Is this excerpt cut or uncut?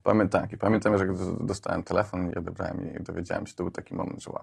cut